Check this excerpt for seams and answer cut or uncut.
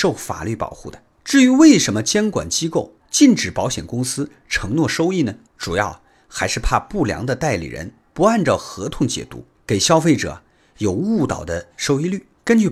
uncut